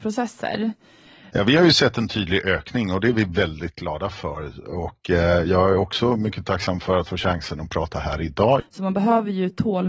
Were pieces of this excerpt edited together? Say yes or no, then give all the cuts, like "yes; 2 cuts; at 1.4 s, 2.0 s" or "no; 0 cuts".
yes; 2 cuts; at 1.3 s, 8.6 s